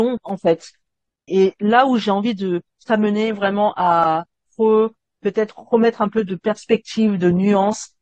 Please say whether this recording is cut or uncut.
cut